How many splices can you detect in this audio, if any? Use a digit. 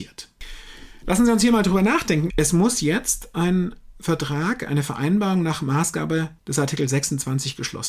2